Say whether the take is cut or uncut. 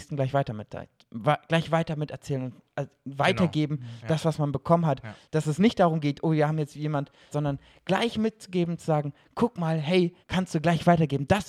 cut